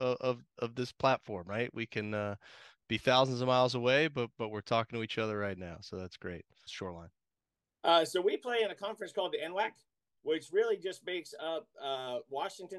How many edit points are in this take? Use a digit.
1